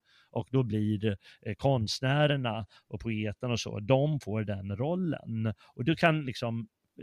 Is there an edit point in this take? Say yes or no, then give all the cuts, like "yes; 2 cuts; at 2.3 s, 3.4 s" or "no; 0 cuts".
no; 0 cuts